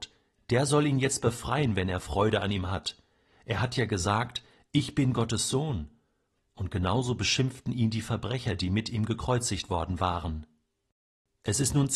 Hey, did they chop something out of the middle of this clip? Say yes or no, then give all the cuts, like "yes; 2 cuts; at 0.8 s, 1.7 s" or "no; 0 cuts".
no; 0 cuts